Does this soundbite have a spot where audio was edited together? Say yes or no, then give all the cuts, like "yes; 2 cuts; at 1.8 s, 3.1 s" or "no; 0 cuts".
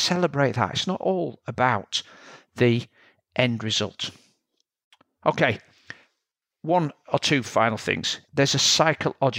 yes; 1 cut; at 8.3 s